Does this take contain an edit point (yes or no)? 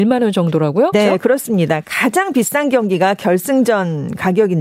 yes